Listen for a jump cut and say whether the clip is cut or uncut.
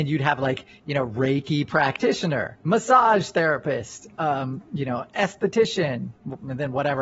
cut